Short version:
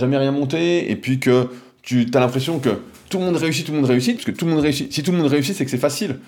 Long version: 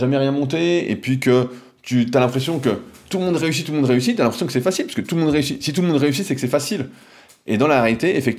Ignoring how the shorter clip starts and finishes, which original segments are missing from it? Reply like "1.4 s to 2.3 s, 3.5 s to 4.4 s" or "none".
4.2 s to 4.9 s